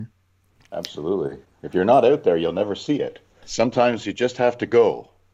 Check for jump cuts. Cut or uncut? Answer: cut